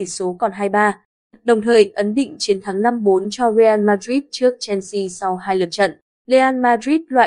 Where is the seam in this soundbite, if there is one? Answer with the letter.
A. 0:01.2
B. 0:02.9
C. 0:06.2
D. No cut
D